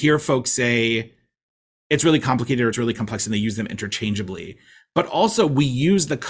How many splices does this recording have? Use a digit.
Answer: 0